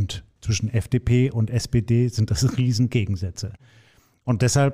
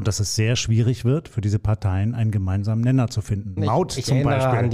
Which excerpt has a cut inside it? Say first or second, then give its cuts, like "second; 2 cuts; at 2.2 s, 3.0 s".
second; 1 cut; at 3.6 s